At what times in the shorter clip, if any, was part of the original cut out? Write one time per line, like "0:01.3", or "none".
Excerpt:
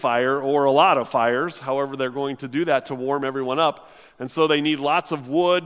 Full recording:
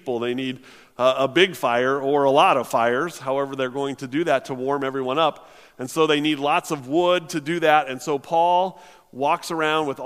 none